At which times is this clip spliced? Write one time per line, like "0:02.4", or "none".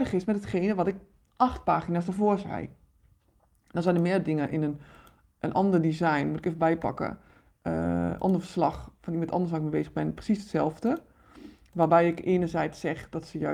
none

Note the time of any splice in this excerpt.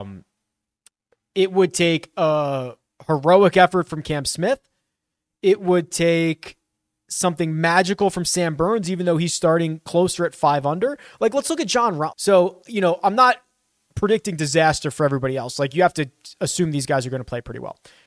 0:12.1

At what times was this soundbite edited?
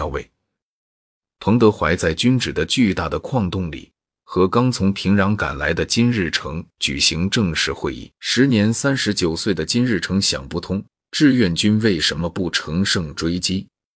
0:01.3
0:08.2

